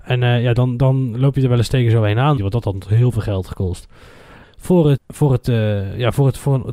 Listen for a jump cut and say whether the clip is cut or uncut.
cut